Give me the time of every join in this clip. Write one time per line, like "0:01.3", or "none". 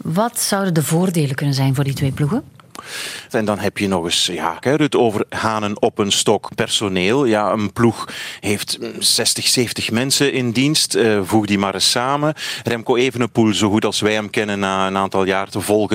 0:03.3
0:04.6
0:06.5